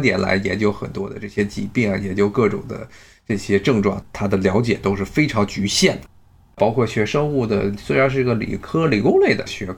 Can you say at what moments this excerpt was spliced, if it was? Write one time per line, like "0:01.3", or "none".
0:06.5